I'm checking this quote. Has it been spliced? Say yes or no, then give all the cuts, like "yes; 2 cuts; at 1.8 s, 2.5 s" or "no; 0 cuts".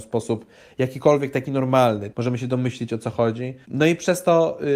yes; 2 cuts; at 2.1 s, 3.6 s